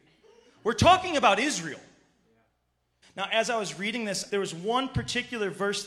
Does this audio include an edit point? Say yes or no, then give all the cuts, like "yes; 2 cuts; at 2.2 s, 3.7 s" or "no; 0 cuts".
yes; 2 cuts; at 3.0 s, 4.3 s